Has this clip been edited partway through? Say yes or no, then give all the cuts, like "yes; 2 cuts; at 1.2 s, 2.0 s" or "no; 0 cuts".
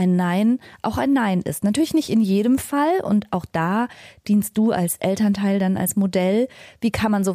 no; 0 cuts